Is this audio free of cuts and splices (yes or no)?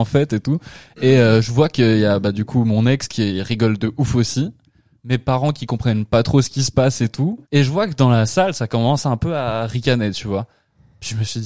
no